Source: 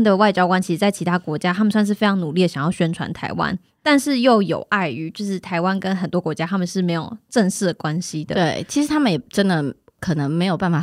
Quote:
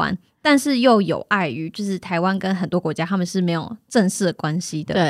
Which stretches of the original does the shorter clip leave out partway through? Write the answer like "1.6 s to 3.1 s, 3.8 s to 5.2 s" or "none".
none